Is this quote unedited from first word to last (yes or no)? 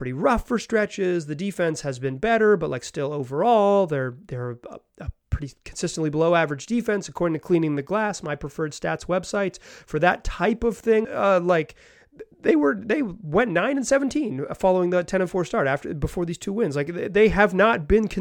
no